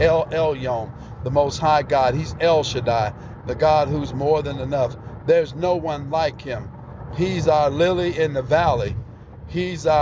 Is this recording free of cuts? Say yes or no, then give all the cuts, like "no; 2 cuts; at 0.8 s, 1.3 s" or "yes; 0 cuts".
yes; 0 cuts